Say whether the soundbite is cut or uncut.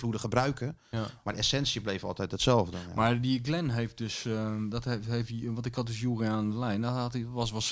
uncut